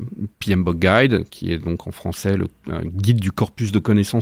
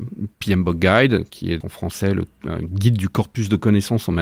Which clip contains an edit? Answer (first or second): second